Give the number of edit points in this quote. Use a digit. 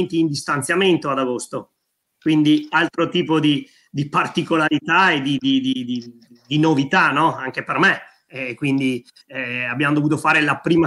0